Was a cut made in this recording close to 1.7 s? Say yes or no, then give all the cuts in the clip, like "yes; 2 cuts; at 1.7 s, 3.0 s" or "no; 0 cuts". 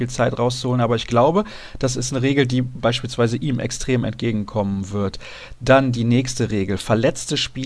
no; 0 cuts